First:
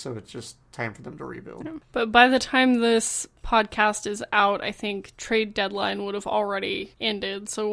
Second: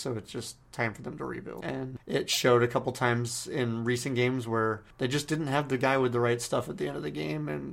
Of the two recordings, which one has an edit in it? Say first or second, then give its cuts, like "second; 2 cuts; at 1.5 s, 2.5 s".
second; 1 cut; at 1.6 s